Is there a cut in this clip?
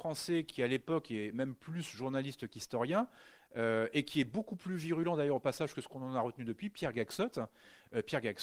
no; 0 cuts

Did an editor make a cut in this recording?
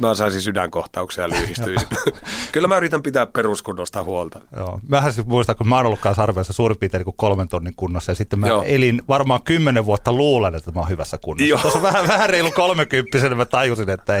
no; 0 cuts

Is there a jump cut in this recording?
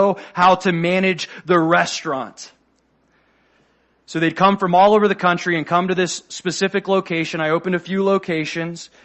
no; 0 cuts

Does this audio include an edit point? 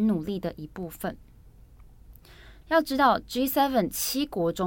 yes; 1 cut; at 2.6 s

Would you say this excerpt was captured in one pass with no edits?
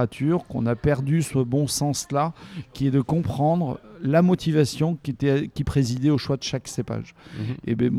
yes; 0 cuts

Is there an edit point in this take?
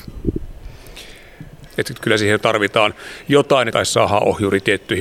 yes; 2 cuts; at 1.7 s, 3.7 s

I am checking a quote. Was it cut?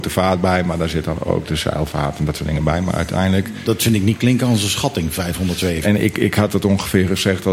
yes; 1 cut; at 5.8 s

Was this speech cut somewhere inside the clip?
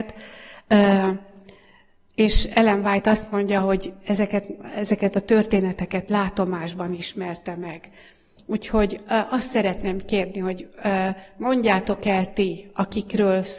no; 0 cuts

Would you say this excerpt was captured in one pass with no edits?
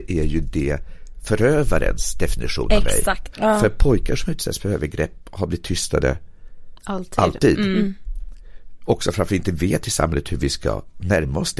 no; 1 cut; at 3.3 s

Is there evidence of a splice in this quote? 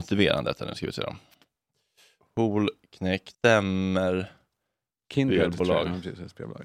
yes; 2 cuts; at 2.2 s, 3.3 s

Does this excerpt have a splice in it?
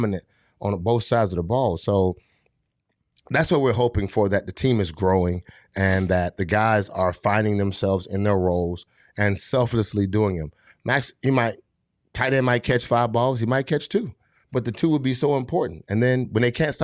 no; 0 cuts

